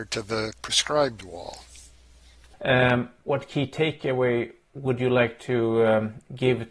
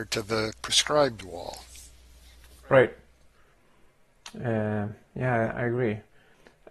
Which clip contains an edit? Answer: first; 1 cut; at 2.5 s

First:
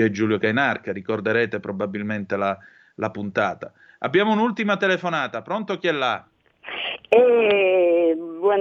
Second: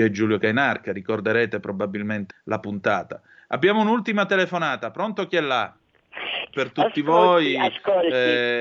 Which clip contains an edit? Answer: second; 2 cuts; at 2.3 s, 6.5 s

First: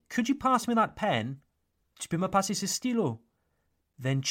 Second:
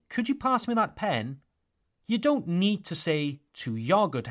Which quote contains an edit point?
second; 1 cut; at 1.9 s

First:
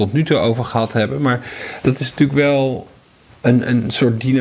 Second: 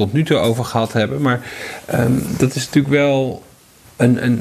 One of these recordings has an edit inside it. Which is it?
first; 1 cut; at 1.8 s

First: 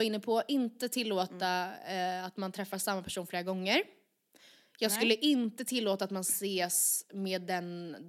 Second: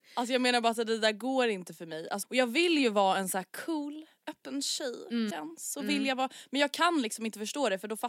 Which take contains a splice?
second; 2 cuts; at 2.2 s, 5.3 s

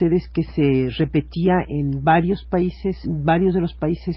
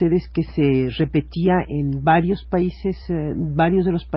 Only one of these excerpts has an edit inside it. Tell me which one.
first; 1 cut; at 3.0 s

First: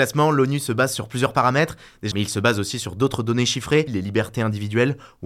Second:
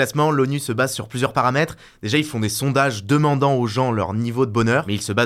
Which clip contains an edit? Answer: first; 2 cuts; at 2.1 s, 3.9 s

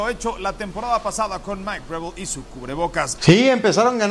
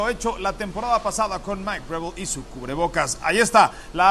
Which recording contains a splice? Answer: first; 1 cut; at 3.2 s

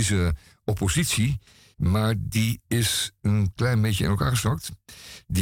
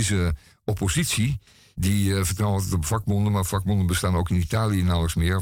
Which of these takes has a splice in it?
second; 1 cut; at 1.7 s

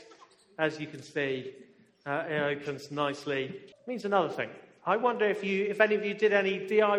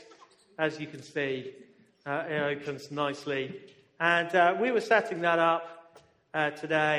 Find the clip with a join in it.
first; 1 cut; at 3.7 s

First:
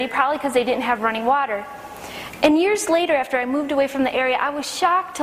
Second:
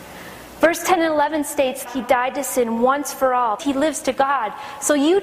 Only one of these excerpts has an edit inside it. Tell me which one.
second; 2 cuts; at 1.9 s, 3.6 s

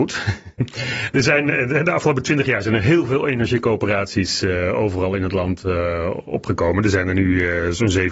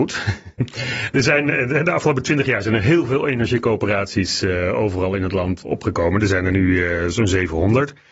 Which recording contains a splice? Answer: second; 1 cut; at 5.6 s

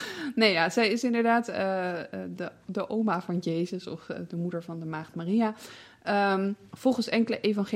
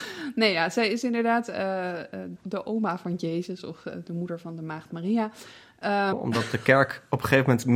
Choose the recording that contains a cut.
second; 2 cuts; at 2.4 s, 6.1 s

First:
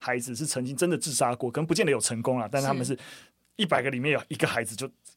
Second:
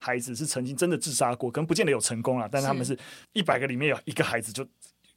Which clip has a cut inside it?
second; 1 cut; at 3.2 s

